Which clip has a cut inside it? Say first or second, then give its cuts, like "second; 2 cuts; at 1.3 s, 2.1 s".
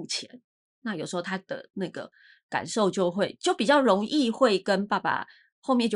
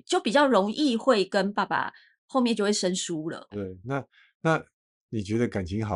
second; 1 cut; at 3.5 s